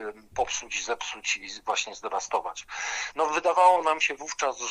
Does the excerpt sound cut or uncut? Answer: cut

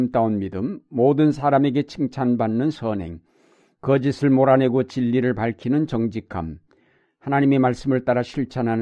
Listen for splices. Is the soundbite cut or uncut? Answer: uncut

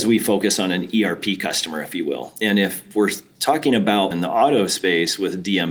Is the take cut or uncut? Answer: cut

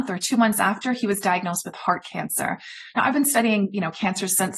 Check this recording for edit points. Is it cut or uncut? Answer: uncut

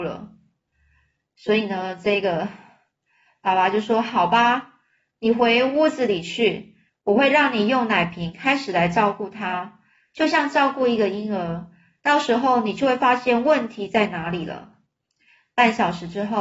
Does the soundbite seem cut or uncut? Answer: cut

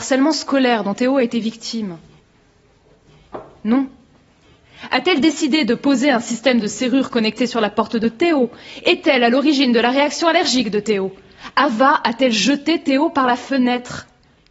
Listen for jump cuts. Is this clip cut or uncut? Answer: cut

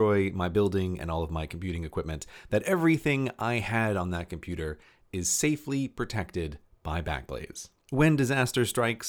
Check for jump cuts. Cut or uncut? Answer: uncut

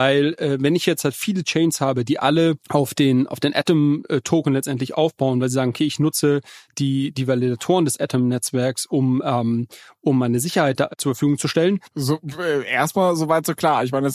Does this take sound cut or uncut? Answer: cut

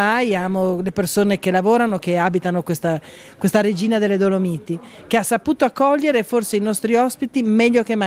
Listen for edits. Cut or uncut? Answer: cut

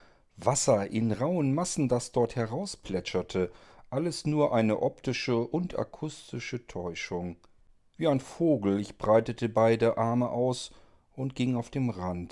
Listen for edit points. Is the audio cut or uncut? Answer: cut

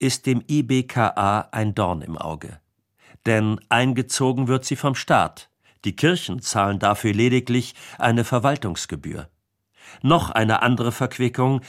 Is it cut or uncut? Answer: uncut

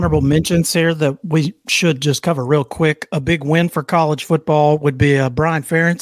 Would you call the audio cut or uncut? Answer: uncut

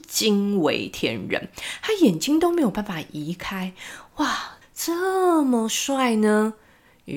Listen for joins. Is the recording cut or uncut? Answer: cut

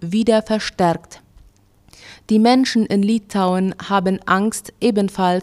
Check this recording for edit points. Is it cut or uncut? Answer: uncut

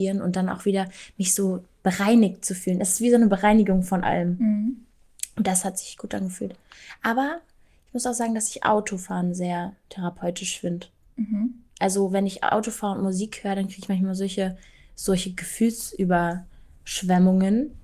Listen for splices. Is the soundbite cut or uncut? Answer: uncut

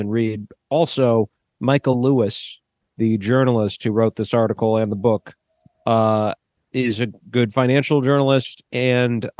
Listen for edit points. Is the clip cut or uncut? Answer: uncut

